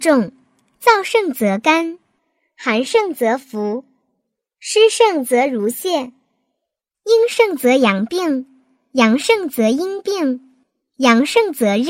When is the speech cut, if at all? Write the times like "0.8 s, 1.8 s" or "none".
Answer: 6.9 s